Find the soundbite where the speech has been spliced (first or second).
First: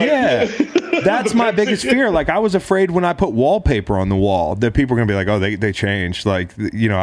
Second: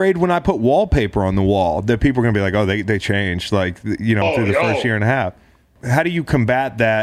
second